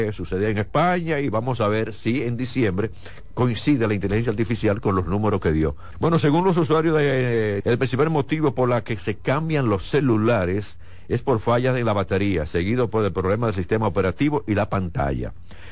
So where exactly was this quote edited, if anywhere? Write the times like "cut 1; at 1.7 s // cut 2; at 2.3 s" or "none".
cut 1; at 5.9 s // cut 2; at 7.6 s